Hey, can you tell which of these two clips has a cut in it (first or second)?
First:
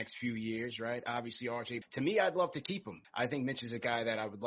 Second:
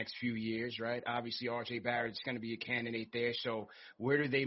first